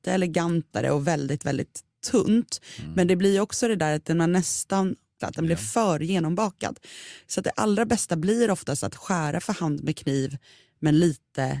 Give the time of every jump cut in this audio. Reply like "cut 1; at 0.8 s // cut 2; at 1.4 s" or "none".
cut 1; at 5.2 s

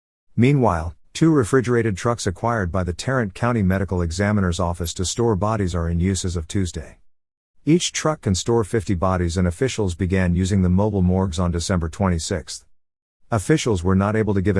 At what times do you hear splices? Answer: cut 1; at 1.0 s

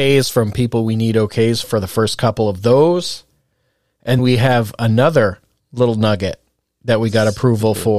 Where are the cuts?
cut 1; at 1.6 s // cut 2; at 4.2 s

